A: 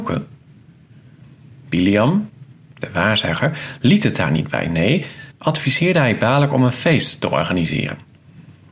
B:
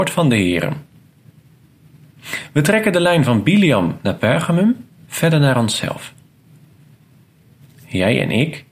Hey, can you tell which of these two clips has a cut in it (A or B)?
A